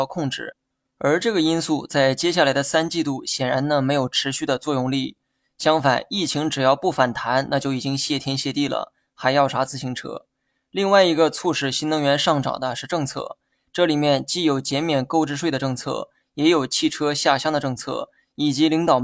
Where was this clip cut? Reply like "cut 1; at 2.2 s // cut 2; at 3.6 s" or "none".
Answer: none